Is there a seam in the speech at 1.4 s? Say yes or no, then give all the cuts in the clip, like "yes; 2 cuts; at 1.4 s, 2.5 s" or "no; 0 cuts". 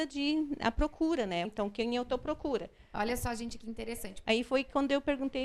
yes; 2 cuts; at 1.4 s, 4.2 s